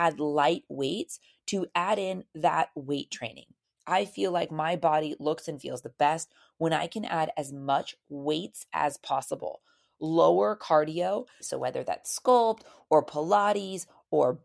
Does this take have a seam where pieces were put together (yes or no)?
yes